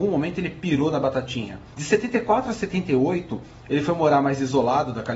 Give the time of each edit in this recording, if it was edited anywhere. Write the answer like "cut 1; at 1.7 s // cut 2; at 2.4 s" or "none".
cut 1; at 1.7 s